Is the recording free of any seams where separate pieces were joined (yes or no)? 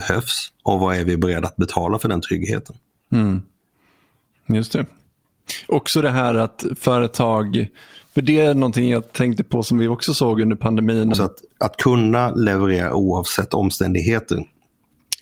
no